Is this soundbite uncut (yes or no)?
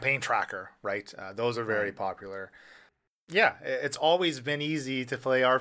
yes